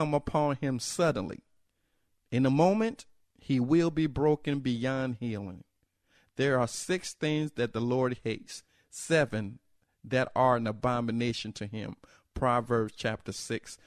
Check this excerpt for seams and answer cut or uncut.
uncut